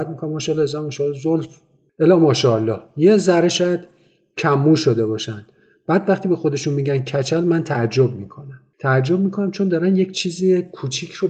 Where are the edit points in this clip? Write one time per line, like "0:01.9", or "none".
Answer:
none